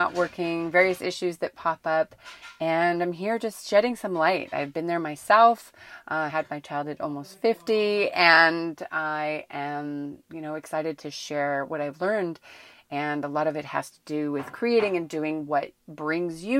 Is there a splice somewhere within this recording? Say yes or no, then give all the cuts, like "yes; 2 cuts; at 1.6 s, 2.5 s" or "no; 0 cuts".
no; 0 cuts